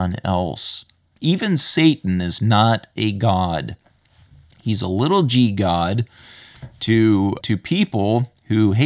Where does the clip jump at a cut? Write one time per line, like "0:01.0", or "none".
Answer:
0:07.4